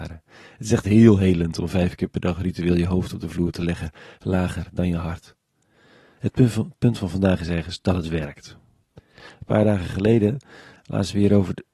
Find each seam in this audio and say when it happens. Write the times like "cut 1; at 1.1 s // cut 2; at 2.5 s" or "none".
cut 1; at 6.2 s // cut 2; at 8.8 s